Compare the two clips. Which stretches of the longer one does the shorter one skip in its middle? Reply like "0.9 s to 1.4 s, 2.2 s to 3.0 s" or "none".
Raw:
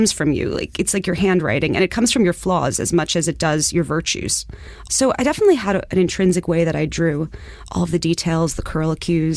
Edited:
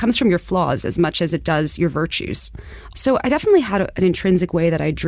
none